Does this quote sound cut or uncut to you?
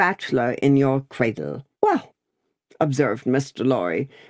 cut